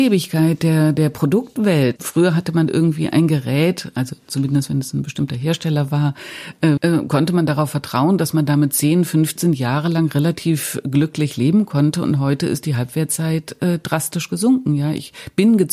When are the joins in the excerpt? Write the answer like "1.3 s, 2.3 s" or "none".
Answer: 2.0 s, 6.8 s